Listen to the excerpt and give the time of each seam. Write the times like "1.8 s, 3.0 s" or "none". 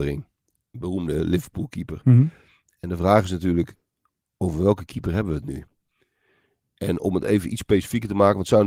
none